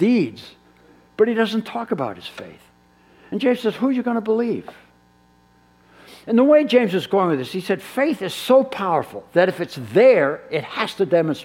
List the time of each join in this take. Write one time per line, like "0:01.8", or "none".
none